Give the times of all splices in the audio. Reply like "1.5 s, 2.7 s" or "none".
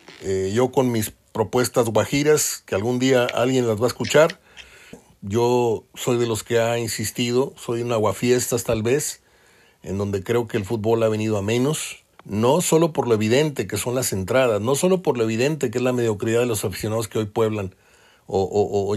4.9 s, 12.1 s